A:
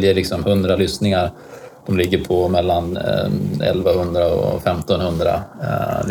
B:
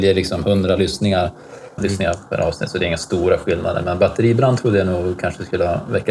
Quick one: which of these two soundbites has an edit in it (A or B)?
B